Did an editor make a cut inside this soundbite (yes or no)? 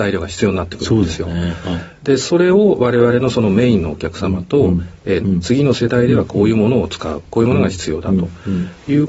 yes